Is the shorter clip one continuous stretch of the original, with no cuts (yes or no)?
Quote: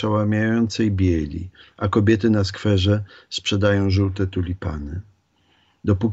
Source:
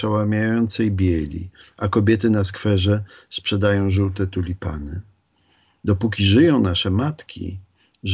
yes